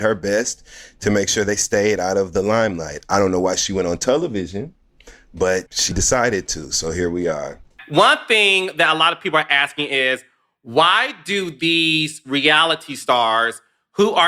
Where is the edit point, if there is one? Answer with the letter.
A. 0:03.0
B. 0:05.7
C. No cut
B